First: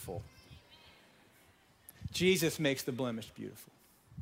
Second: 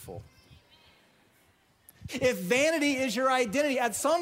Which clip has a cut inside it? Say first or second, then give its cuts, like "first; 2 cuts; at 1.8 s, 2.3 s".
second; 1 cut; at 2.1 s